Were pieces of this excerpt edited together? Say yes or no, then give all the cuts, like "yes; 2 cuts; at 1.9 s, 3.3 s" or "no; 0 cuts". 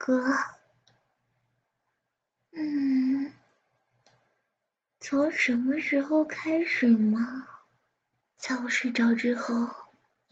yes; 1 cut; at 8.2 s